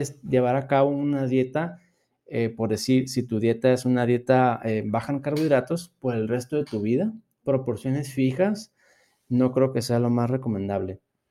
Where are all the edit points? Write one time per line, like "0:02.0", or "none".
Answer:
0:07.4